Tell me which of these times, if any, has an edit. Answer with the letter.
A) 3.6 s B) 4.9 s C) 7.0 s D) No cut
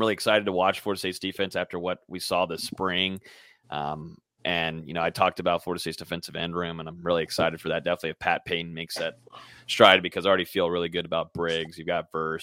D